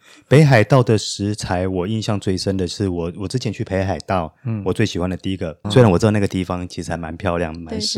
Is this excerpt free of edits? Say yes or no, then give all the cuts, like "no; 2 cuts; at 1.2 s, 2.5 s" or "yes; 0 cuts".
no; 1 cut; at 5.6 s